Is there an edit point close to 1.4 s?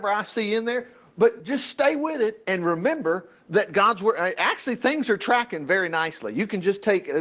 no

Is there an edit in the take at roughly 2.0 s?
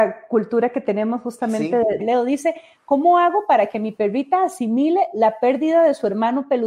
yes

